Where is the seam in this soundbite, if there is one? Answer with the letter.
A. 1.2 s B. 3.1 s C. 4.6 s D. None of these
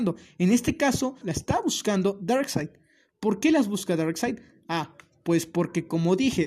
A